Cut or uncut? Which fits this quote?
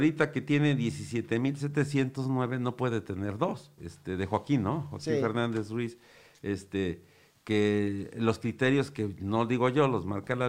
cut